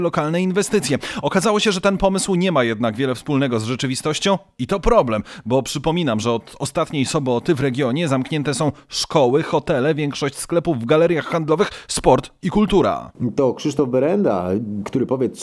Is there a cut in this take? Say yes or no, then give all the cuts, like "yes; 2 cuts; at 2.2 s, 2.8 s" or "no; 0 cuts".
no; 0 cuts